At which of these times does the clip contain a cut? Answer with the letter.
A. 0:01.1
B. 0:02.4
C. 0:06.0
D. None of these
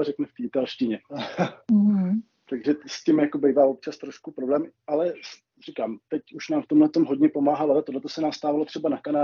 A